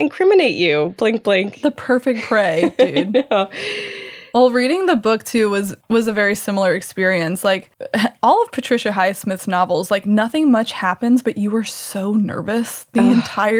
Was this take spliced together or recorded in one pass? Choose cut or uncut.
uncut